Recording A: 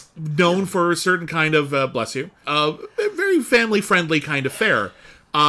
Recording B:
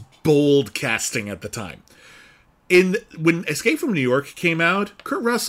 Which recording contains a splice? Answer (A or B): A